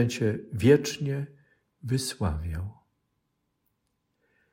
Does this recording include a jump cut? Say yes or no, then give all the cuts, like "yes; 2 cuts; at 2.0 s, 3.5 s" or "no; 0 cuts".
no; 0 cuts